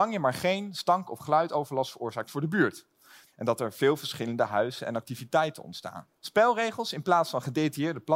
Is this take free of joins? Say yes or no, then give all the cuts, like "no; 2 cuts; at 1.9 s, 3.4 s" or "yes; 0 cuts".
no; 2 cuts; at 3.3 s, 6.2 s